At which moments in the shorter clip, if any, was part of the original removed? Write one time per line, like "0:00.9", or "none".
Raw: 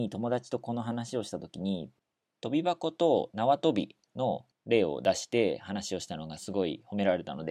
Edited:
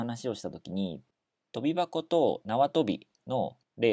none